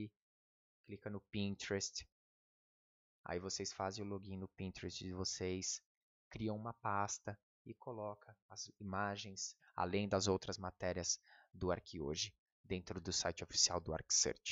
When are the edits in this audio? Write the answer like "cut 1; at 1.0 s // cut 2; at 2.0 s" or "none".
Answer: cut 1; at 9.6 s